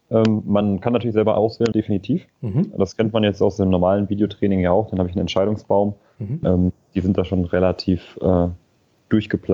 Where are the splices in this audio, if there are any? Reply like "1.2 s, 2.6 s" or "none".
1.7 s, 6.4 s